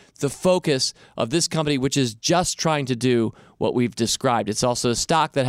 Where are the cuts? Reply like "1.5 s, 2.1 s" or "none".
none